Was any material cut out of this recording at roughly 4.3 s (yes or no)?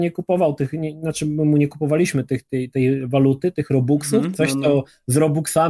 yes